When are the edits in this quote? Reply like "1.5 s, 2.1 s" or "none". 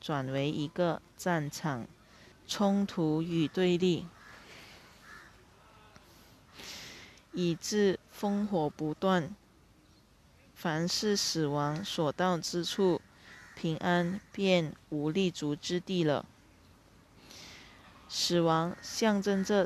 2.3 s